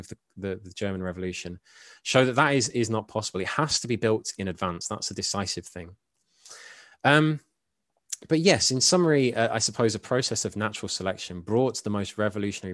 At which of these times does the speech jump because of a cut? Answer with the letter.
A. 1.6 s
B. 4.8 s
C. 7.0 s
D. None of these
D